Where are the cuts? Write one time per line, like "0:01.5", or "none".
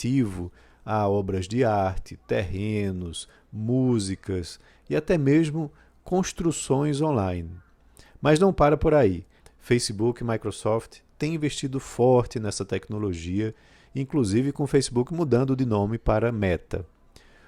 0:09.4